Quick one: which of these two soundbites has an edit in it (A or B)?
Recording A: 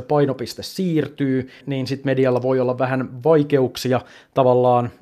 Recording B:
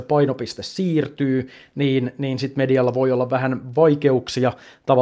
A